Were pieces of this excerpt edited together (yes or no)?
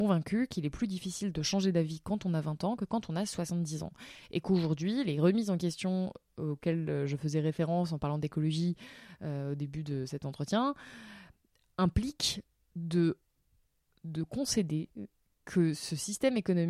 no